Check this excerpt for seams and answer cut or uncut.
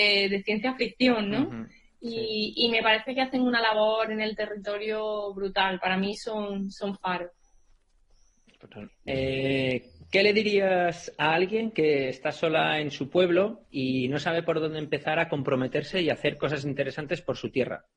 cut